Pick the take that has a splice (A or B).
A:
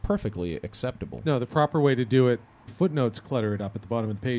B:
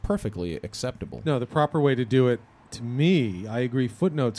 A